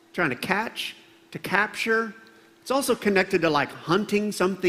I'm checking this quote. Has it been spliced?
no; 0 cuts

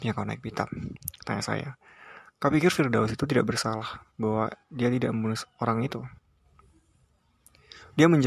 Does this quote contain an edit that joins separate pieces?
no; 0 cuts

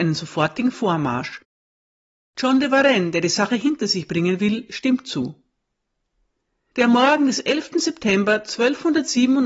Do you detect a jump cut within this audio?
no; 0 cuts

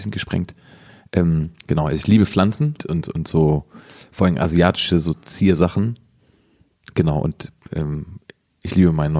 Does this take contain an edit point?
yes; 2 cuts; at 1.6 s, 2.8 s

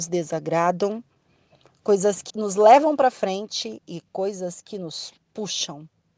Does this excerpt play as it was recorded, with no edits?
no; 1 cut; at 2.3 s

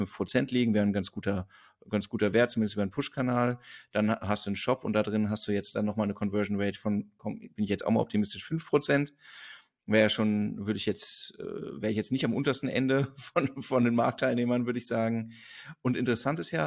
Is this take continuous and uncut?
yes; 0 cuts

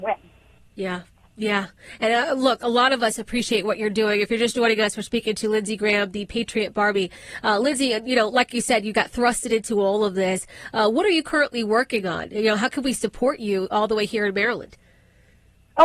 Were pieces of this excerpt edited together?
no; 0 cuts

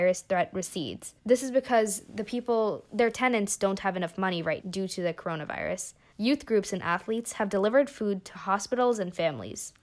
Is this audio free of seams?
no; 3 cuts; at 1.2 s, 4.6 s, 6.1 s

